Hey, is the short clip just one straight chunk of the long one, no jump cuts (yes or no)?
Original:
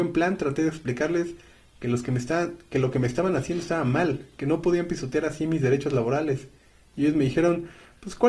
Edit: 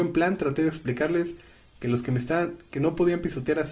no